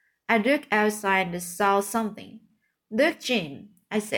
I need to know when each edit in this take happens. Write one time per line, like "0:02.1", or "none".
none

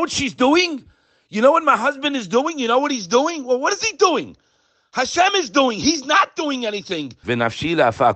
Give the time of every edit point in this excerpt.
0:07.2

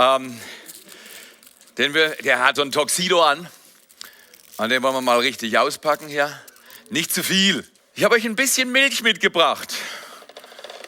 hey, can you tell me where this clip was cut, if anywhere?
0:02.6
0:07.8

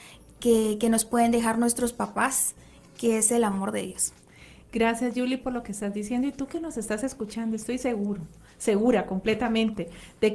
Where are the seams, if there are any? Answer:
none

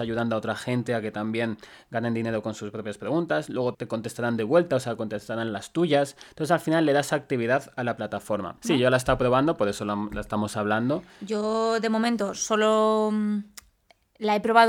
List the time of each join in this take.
0:03.7
0:08.6

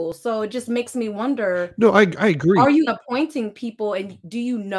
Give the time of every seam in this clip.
0:02.9

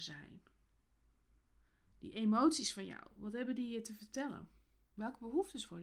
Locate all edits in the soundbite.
none

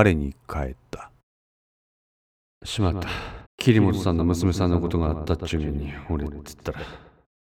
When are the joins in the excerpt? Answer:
0:03.4

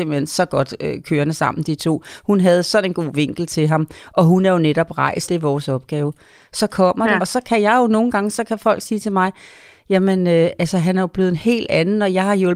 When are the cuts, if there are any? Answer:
0:05.2
0:07.2

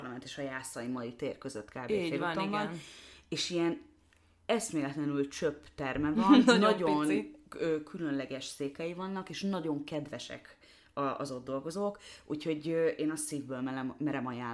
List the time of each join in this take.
none

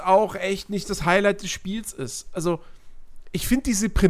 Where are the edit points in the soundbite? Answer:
none

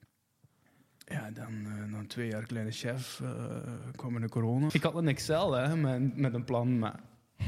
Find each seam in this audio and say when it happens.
0:04.7

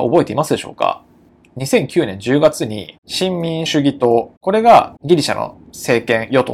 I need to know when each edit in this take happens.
0:03.7

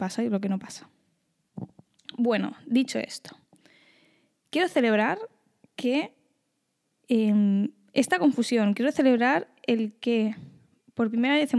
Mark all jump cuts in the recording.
none

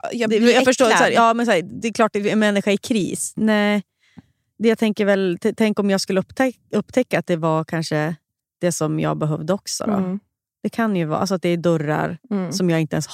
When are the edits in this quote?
0:03.4

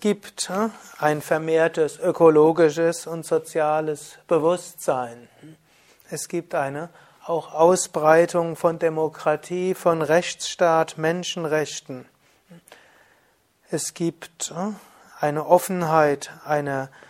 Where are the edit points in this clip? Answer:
0:05.9

